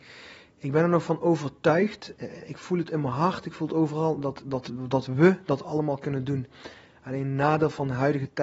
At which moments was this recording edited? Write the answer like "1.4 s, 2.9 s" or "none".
none